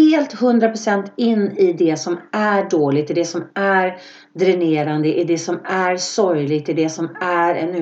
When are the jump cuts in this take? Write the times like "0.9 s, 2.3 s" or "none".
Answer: none

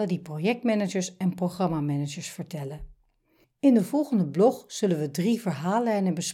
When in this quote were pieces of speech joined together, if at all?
3.4 s

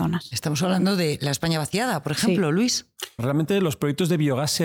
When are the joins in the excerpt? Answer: 3.2 s

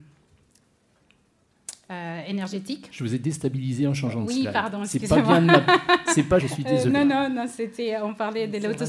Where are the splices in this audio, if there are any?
6.4 s

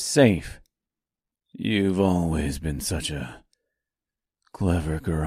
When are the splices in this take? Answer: 1.3 s

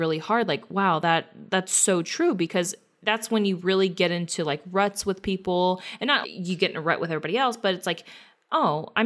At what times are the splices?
6.2 s

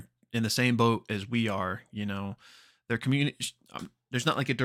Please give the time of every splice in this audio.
none

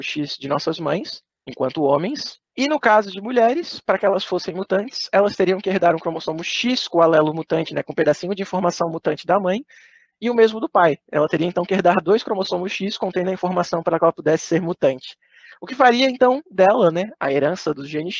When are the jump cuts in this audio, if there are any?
none

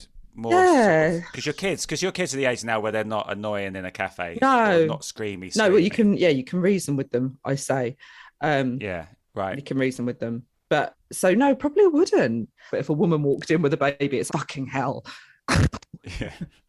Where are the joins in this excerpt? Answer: 12.7 s, 14.3 s

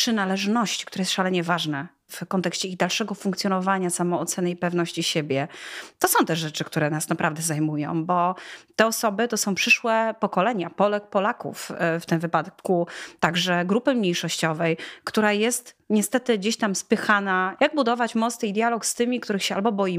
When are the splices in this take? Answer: 17.6 s

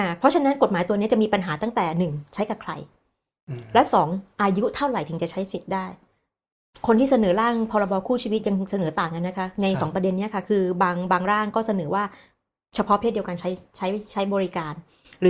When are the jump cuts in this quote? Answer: none

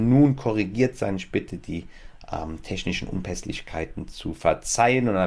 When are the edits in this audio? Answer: none

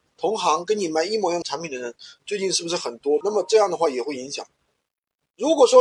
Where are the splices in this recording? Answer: 1.4 s, 3.2 s

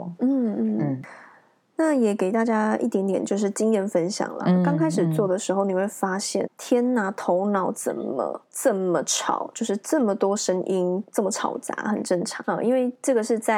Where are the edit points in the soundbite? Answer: 6.5 s, 12.4 s

